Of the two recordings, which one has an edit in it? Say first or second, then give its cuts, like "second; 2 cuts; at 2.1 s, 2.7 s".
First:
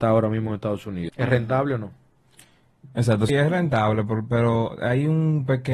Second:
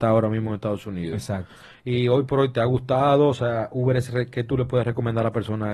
first; 2 cuts; at 1.1 s, 3.3 s